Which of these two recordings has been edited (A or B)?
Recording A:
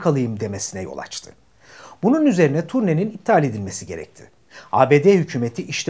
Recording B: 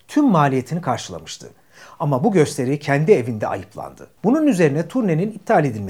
B